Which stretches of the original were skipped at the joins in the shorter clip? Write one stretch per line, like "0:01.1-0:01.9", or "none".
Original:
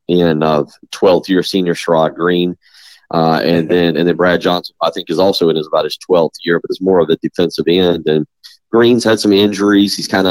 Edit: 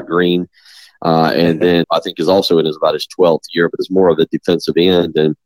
0:03.9-0:04.7